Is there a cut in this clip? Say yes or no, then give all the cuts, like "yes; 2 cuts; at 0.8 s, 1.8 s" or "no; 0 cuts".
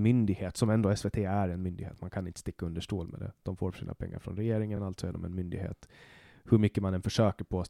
no; 0 cuts